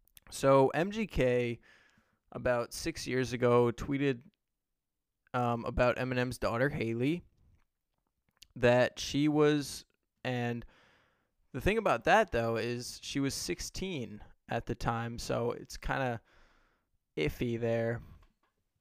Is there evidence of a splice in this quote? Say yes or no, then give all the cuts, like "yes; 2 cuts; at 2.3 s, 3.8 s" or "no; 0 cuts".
yes; 1 cut; at 10.2 s